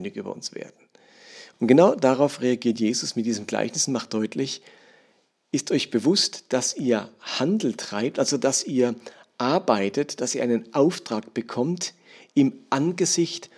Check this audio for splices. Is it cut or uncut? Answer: cut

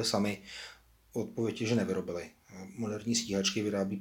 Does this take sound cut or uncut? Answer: uncut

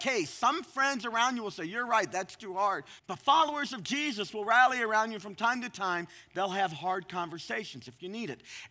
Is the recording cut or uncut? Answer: cut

